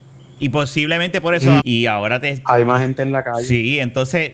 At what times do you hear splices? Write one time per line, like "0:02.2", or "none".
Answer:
0:01.6